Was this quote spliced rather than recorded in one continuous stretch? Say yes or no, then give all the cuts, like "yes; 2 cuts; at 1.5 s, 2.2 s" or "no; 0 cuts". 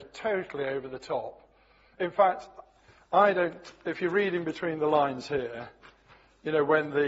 no; 0 cuts